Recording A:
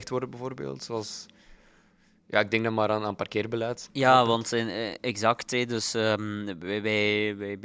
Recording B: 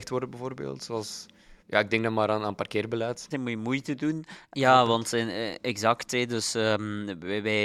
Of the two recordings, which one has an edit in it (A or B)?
B